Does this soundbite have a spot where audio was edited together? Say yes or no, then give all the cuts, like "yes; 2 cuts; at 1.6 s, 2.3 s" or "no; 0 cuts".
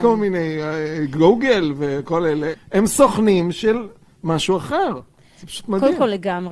yes; 1 cut; at 2.5 s